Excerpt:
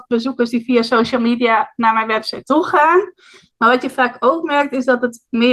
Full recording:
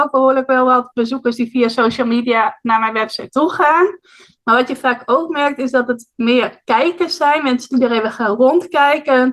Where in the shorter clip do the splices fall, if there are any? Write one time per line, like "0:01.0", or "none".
none

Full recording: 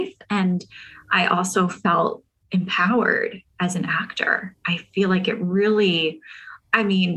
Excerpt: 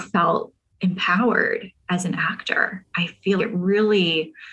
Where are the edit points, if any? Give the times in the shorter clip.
0:03.4

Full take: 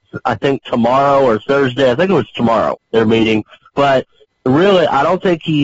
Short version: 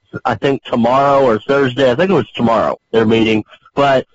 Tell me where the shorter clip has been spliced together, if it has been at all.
none

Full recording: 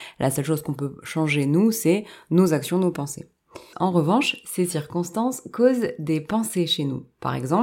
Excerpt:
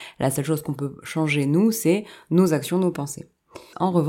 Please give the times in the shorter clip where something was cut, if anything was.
none

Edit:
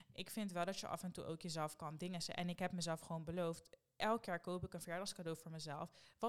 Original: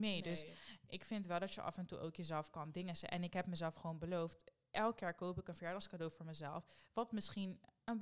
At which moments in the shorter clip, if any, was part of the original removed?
none

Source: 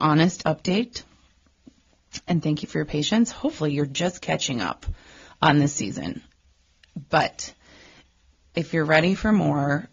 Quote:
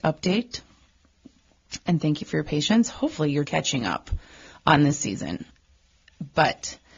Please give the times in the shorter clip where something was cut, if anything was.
0:03.4

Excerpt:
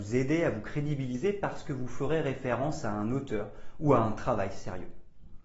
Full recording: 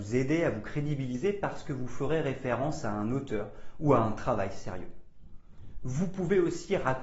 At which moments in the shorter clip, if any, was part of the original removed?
none

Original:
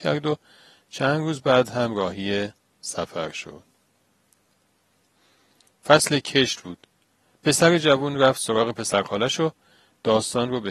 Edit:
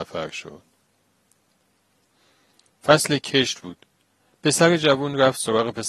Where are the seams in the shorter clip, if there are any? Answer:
none

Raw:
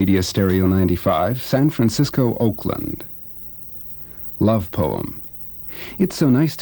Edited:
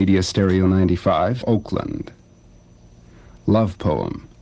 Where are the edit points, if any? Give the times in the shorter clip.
0:01.4

